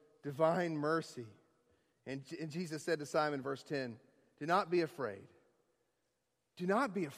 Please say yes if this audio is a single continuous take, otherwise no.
yes